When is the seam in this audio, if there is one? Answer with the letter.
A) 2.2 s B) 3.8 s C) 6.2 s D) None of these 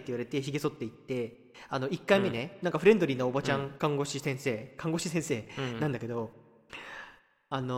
B